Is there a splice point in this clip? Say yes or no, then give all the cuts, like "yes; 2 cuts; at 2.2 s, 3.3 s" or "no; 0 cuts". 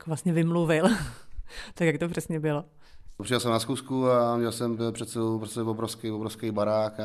no; 0 cuts